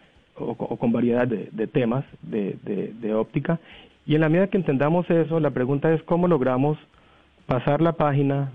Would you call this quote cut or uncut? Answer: cut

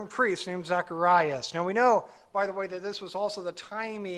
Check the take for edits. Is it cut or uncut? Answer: uncut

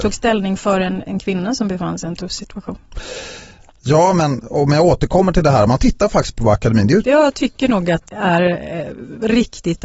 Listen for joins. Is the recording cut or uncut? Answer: cut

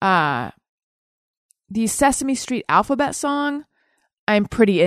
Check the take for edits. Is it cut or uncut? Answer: uncut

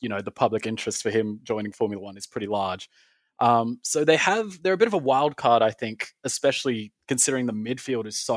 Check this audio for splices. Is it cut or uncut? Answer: uncut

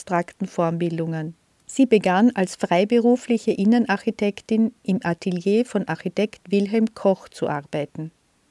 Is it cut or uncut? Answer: cut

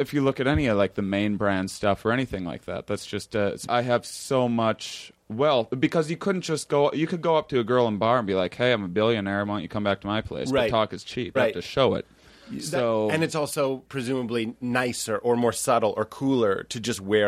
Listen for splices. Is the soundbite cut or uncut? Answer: cut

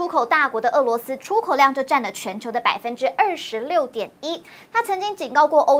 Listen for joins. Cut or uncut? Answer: cut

